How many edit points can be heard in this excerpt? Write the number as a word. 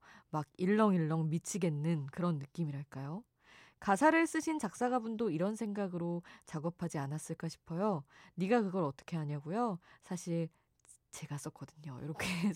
zero